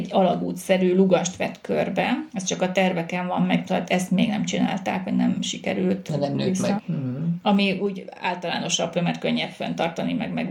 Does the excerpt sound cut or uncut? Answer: cut